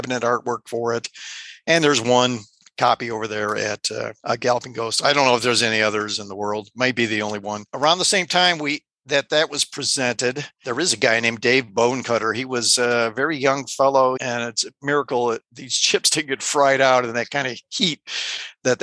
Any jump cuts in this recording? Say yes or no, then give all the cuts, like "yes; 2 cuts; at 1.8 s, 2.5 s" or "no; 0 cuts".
yes; 1 cut; at 14.2 s